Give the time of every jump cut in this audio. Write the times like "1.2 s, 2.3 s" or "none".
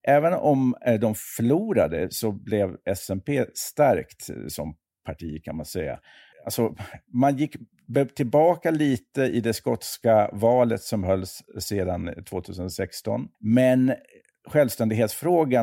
6.3 s, 13.3 s